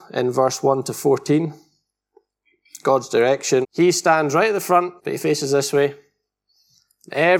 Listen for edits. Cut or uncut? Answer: cut